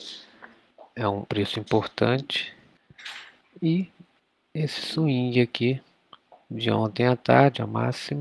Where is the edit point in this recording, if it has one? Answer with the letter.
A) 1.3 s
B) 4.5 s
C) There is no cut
A